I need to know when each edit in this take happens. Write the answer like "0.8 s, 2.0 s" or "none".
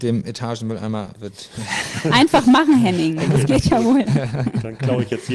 none